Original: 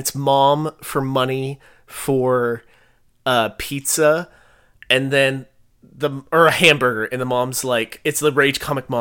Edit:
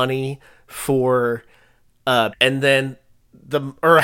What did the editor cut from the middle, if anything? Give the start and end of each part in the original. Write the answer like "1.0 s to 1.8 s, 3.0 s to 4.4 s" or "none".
3.5 s to 4.8 s